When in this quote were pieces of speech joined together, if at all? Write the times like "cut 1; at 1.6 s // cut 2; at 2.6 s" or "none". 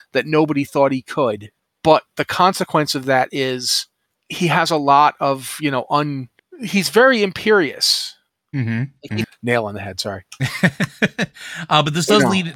cut 1; at 9.2 s

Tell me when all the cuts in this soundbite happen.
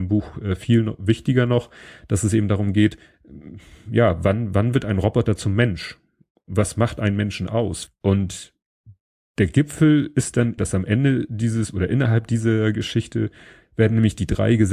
cut 1; at 7.9 s // cut 2; at 10.6 s

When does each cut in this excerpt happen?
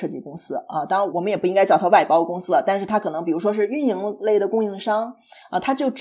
cut 1; at 1.1 s

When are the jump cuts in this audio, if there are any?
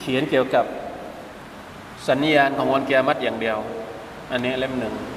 none

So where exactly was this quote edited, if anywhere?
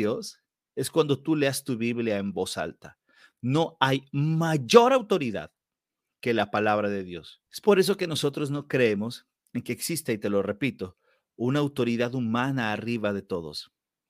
cut 1; at 7.5 s

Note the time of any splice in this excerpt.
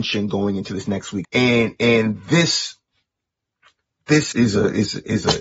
cut 1; at 1.2 s // cut 2; at 4.3 s

